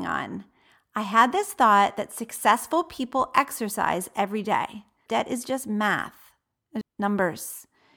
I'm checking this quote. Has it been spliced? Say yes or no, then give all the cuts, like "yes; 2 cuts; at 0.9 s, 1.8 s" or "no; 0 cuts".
yes; 2 cuts; at 5.1 s, 6.8 s